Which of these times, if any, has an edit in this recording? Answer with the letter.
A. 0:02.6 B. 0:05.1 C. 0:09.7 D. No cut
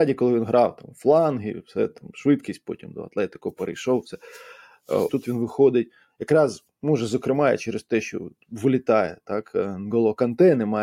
B